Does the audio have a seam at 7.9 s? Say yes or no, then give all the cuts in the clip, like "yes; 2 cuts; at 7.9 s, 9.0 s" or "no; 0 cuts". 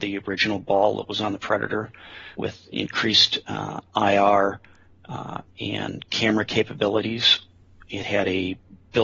no; 1 cut; at 2.4 s